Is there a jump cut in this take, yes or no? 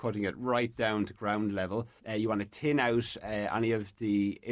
yes